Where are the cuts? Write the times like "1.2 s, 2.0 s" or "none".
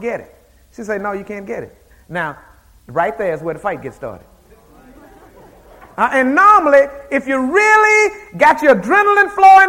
none